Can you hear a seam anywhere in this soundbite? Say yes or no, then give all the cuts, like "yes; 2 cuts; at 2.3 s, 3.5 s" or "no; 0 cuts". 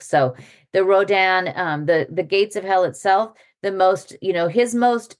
no; 0 cuts